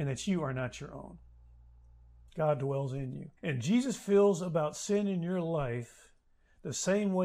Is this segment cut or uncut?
cut